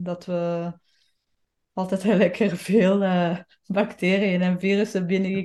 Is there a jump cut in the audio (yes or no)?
no